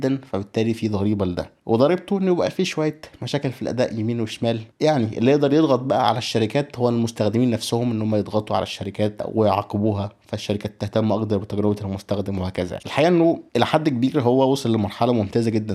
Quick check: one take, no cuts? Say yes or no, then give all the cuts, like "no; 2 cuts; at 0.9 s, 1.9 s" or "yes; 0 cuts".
no; 1 cut; at 12.8 s